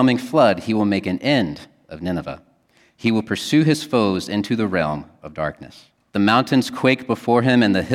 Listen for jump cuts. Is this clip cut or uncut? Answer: cut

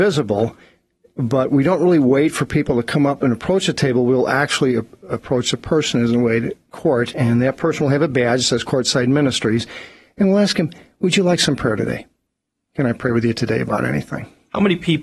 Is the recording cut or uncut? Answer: uncut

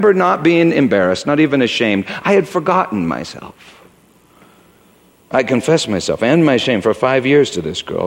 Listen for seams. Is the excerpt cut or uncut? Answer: uncut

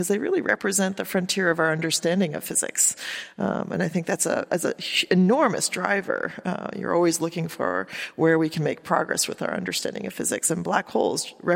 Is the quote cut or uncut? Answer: uncut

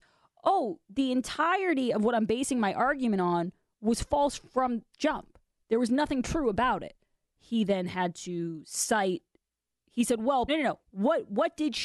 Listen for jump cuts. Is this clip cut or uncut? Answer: cut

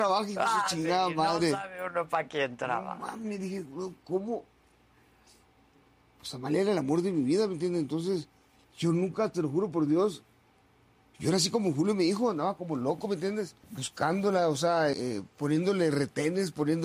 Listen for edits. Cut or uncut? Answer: cut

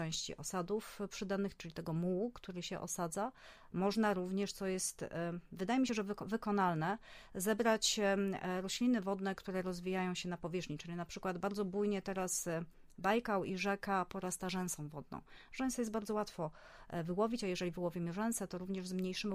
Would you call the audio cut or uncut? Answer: uncut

